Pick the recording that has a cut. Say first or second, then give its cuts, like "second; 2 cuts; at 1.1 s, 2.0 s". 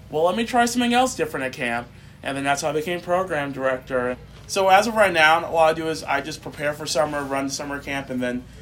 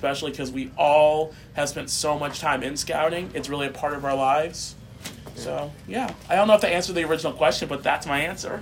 first; 1 cut; at 4.1 s